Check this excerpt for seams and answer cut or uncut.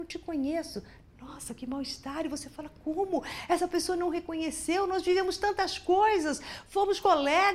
uncut